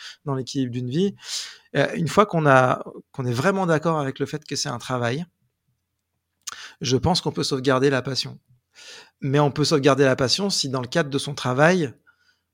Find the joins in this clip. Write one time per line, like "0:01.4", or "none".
none